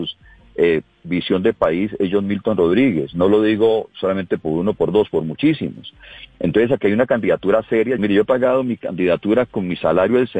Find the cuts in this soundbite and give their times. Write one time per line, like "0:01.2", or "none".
0:08.0

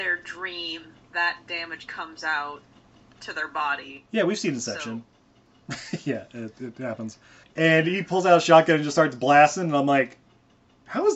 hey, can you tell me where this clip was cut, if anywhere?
0:07.4

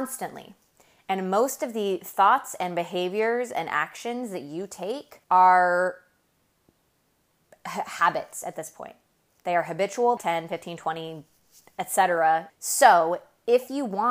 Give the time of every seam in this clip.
0:05.2
0:10.2
0:12.5

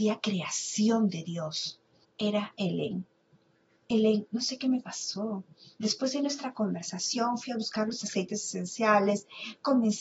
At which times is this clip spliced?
0:02.0

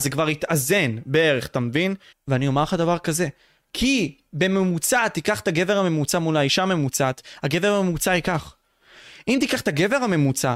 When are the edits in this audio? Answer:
0:02.1

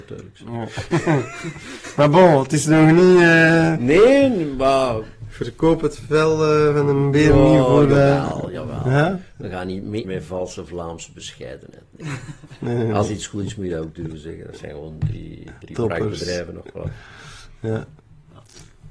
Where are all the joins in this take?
0:10.0

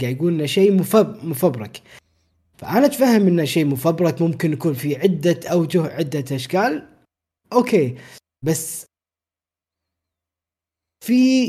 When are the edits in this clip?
none

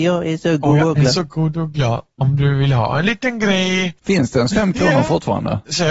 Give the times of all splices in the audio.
0:04.0

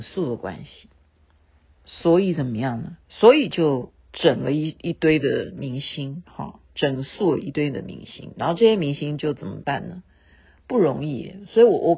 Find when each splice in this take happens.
0:03.0

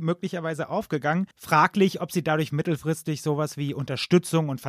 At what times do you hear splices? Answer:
0:01.3
0:02.5

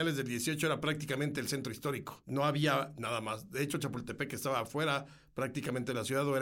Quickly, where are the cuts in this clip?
none

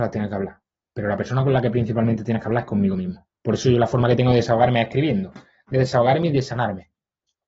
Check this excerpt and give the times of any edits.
none

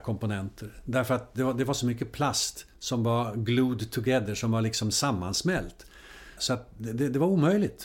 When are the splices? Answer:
0:06.4

